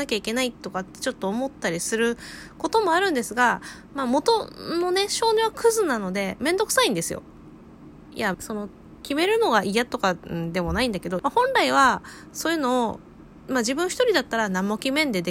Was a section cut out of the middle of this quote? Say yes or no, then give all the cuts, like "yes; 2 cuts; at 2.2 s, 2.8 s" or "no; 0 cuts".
yes; 2 cuts; at 8.3 s, 11.2 s